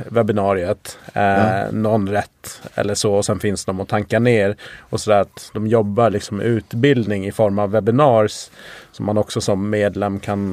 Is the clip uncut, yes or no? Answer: yes